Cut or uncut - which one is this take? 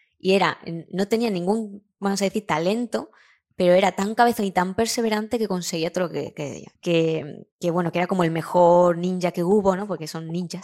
cut